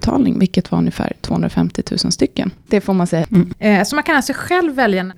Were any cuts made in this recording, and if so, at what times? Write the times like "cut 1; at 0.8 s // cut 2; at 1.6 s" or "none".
cut 1; at 2.7 s